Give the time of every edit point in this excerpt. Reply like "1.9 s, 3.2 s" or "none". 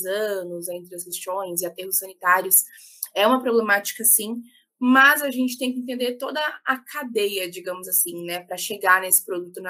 none